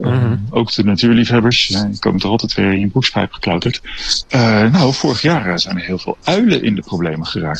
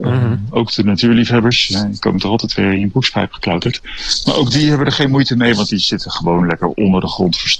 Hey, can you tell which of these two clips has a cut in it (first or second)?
first